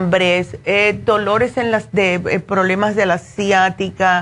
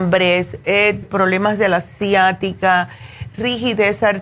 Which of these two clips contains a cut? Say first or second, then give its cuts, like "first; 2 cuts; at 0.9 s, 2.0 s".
second; 1 cut; at 1.0 s